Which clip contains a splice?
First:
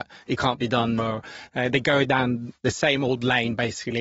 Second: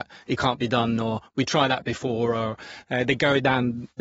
first; 1 cut; at 1.0 s

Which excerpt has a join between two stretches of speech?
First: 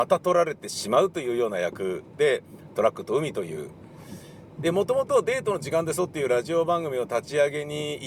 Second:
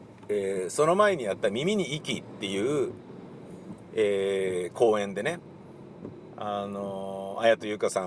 first; 1 cut; at 4.6 s

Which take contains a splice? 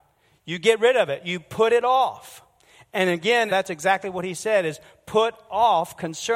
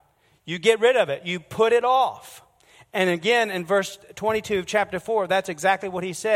first; 1 cut; at 3.5 s

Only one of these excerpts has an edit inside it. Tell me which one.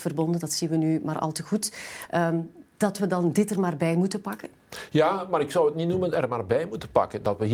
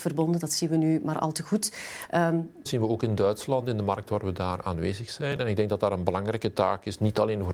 second; 1 cut; at 2.7 s

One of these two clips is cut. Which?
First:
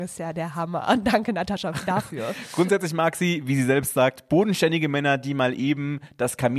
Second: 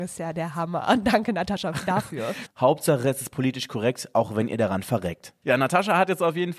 second; 2 cuts; at 2.5 s, 5.4 s

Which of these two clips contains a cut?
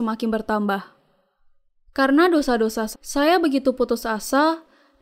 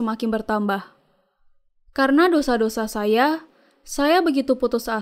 first; 1 cut; at 2.9 s

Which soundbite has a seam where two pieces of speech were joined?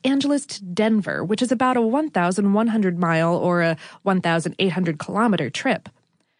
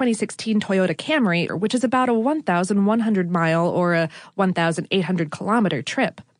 second; 1 cut; at 1.5 s

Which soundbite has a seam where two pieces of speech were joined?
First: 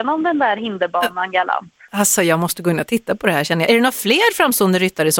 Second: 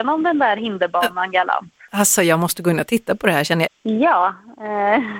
second; 1 cut; at 3.7 s

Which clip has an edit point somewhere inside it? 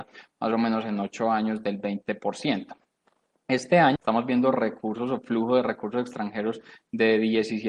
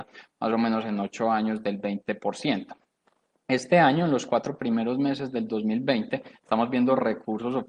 first; 1 cut; at 4.0 s

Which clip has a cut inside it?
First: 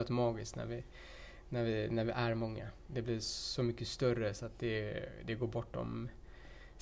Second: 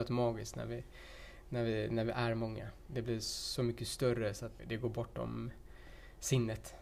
second; 1 cut; at 4.6 s

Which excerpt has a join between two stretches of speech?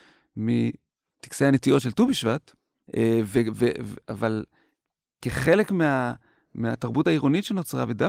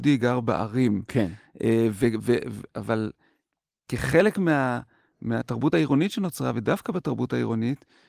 first; 1 cut; at 2.9 s

